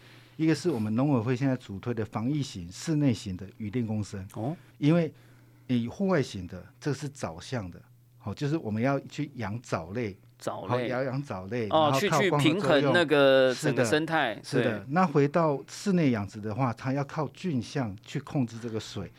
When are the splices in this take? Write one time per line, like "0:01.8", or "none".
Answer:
0:04.7